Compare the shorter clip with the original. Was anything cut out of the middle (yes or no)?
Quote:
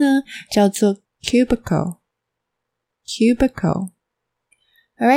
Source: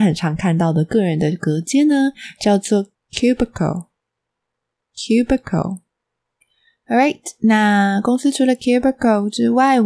no